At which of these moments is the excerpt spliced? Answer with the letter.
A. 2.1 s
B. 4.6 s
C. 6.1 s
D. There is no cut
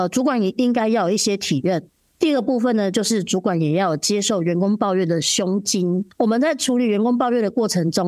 A